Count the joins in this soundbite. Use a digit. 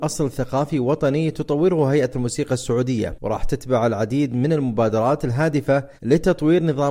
1